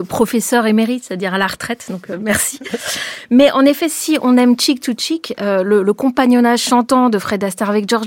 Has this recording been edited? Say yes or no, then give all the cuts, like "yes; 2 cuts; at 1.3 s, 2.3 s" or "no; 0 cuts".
no; 0 cuts